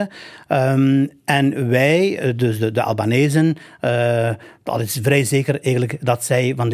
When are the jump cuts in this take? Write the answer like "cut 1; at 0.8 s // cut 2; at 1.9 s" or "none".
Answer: none